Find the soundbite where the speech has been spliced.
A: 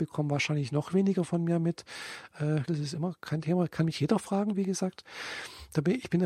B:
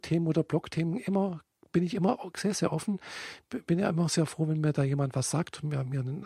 A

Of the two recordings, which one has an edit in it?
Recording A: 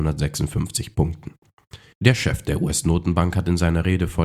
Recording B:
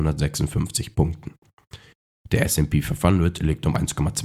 A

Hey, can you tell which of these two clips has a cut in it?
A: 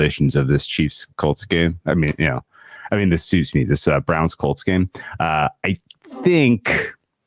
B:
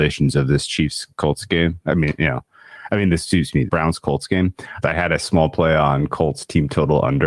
B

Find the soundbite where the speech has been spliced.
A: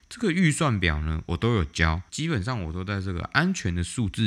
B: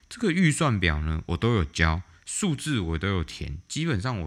A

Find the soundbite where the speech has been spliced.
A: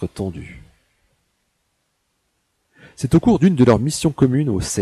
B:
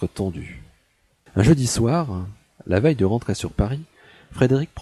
B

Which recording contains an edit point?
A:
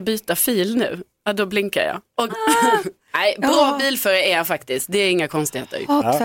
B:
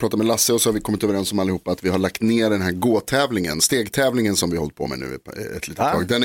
A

